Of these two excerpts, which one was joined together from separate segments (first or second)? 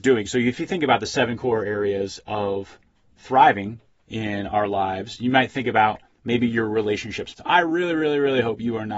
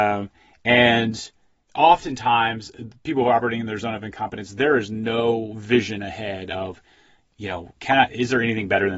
first